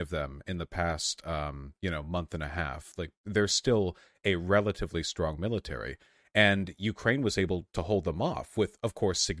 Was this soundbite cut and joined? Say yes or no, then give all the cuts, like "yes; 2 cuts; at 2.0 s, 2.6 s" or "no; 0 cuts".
no; 0 cuts